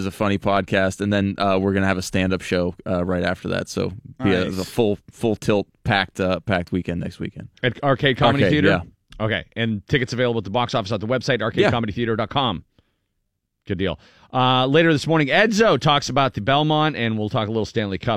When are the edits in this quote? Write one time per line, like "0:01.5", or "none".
none

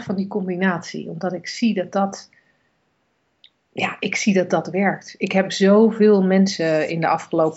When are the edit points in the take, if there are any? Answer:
none

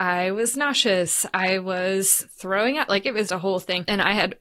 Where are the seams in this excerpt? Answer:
0:03.3

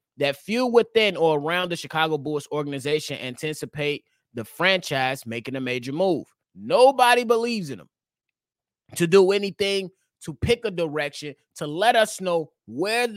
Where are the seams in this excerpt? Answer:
0:06.4
0:10.2

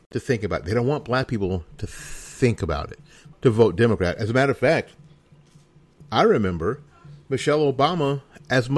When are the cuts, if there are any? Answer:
0:03.3
0:06.1

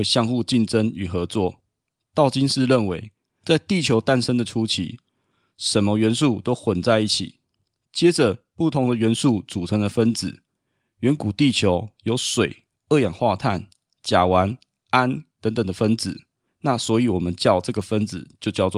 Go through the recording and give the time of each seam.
0:16.5

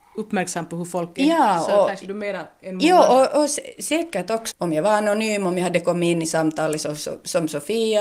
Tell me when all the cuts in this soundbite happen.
0:04.5

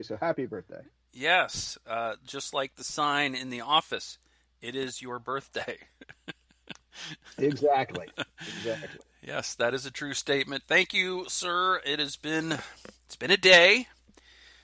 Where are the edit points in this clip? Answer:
none

